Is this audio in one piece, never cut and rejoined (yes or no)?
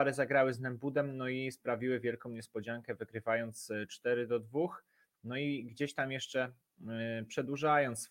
yes